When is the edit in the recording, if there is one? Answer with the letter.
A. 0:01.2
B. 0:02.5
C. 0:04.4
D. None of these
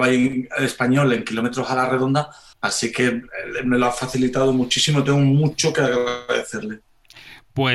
B